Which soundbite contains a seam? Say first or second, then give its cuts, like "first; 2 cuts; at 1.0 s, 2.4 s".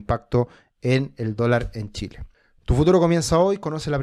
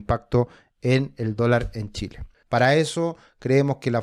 second; 1 cut; at 2.4 s